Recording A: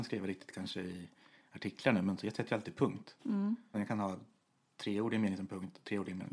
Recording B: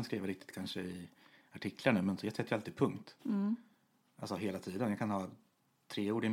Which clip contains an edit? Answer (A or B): A